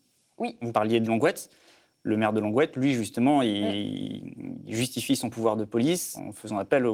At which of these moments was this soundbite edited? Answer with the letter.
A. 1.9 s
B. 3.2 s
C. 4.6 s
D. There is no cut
D